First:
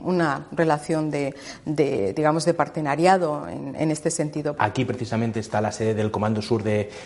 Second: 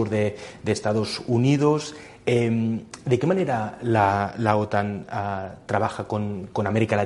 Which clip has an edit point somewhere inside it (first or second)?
first